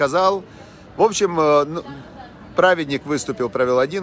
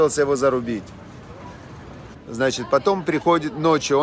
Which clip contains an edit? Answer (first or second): second